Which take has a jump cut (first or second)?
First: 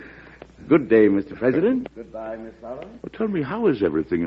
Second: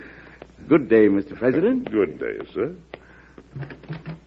first